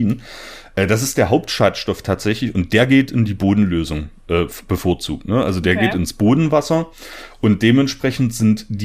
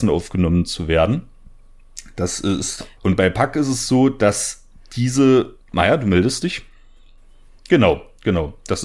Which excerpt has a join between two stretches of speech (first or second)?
second